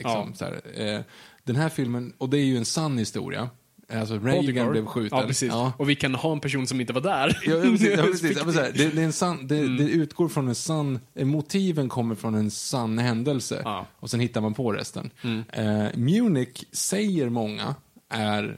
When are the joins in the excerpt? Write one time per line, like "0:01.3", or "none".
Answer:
none